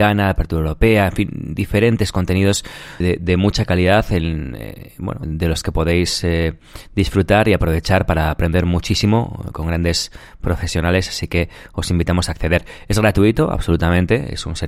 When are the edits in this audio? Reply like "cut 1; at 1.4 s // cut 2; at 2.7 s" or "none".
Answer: cut 1; at 3.0 s // cut 2; at 5.2 s